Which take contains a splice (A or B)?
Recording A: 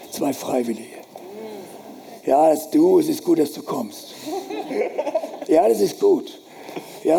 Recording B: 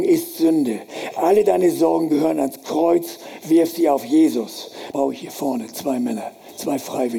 B